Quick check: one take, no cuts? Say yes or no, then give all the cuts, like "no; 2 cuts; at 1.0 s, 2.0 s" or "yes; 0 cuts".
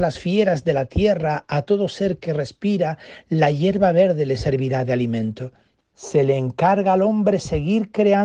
no; 1 cut; at 5.8 s